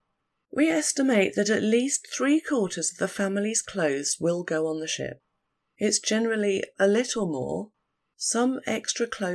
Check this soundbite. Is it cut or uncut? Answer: uncut